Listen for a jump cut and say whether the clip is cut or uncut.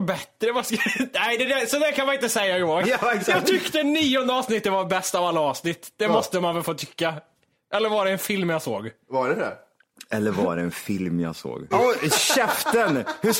cut